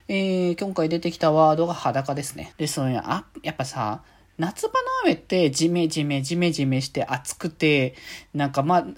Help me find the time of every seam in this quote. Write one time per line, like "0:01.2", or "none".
0:02.5